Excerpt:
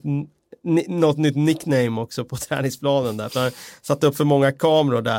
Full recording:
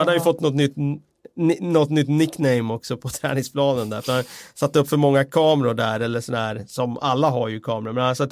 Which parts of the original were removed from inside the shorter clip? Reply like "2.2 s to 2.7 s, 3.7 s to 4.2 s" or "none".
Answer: none